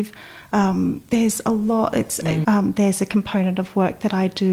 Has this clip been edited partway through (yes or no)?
yes